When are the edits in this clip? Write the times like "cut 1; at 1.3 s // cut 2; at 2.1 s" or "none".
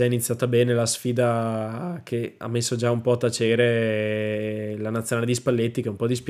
none